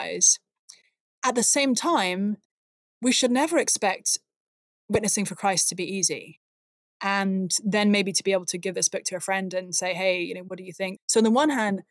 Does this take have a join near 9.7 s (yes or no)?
no